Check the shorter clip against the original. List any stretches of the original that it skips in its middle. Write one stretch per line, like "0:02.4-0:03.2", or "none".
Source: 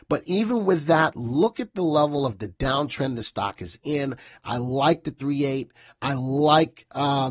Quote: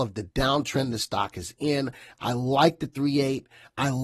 none